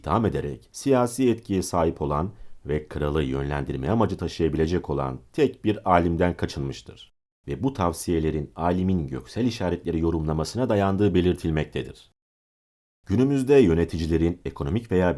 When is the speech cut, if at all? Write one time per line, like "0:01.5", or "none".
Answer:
0:07.4